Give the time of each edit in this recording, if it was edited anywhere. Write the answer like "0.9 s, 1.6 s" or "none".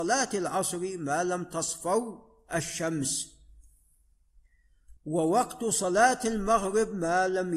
5.0 s